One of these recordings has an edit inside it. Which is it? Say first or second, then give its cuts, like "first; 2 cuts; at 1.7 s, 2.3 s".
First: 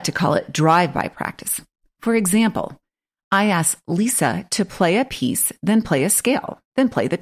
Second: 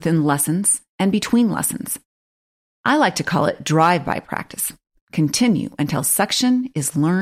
second; 1 cut; at 5.0 s